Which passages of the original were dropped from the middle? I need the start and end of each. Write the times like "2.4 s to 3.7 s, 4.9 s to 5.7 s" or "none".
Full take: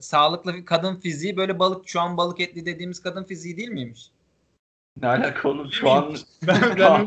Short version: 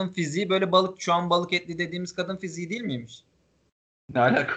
none